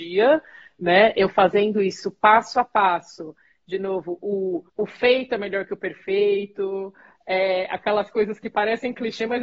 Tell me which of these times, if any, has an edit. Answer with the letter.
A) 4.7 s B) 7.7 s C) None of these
A